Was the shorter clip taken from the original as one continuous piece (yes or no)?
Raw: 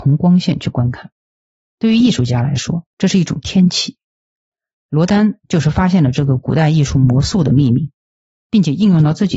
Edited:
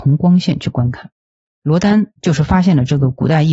no